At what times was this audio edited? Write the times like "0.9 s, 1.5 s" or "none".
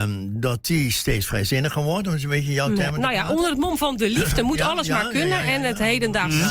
none